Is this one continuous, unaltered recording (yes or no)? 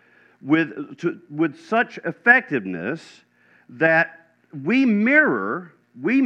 yes